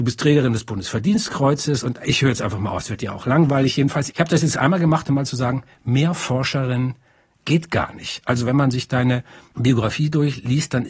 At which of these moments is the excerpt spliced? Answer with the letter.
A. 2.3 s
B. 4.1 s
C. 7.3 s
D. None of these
B